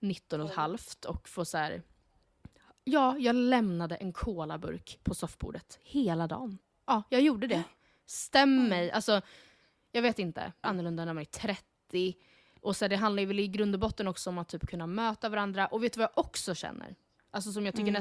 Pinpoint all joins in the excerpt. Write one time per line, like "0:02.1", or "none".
0:10.6